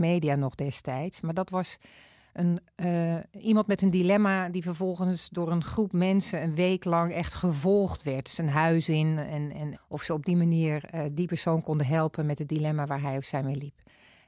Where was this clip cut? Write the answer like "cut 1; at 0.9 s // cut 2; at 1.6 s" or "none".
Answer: cut 1; at 9.7 s